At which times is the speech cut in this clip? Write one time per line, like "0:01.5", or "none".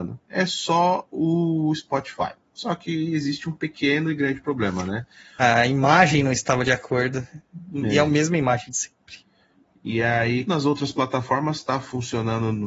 0:05.4
0:10.5